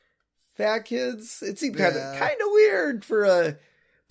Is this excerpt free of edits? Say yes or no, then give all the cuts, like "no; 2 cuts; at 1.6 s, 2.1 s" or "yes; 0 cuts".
yes; 0 cuts